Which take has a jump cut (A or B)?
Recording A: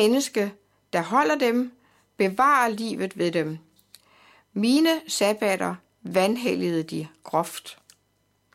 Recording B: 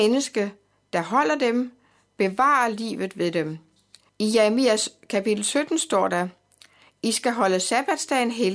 B